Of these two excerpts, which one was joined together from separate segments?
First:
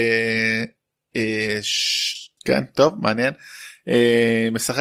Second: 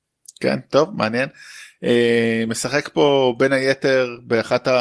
first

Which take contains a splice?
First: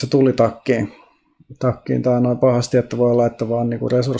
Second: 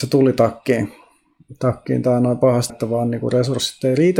second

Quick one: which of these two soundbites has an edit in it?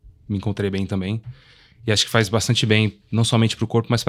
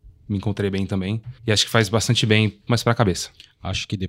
second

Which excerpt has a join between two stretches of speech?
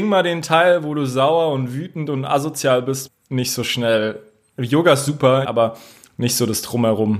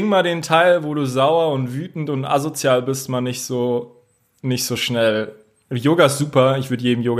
first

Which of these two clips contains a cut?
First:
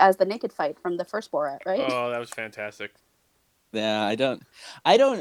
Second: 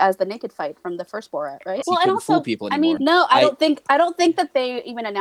second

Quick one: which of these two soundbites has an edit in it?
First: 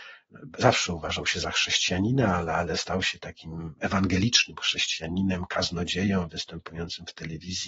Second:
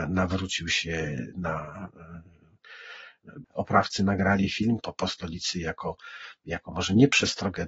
second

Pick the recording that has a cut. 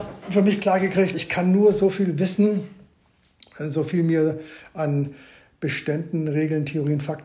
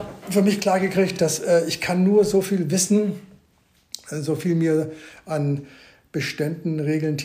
first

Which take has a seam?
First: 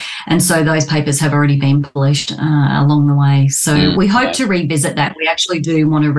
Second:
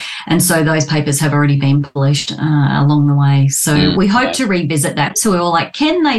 second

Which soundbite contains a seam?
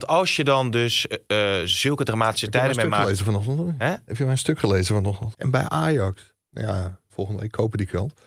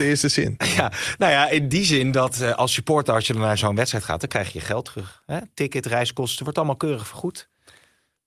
first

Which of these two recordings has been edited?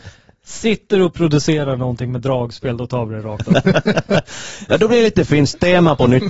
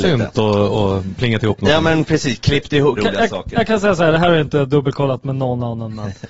second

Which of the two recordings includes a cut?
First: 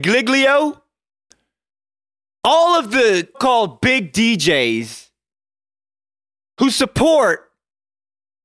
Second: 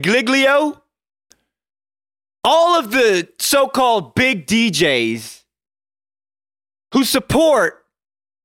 first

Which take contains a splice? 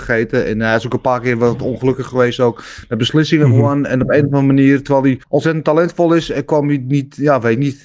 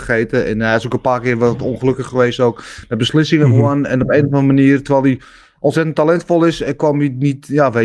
first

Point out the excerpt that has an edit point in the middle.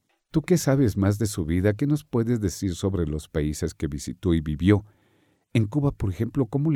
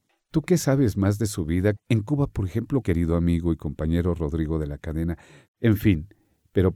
second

